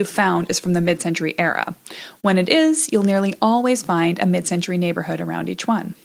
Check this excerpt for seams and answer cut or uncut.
uncut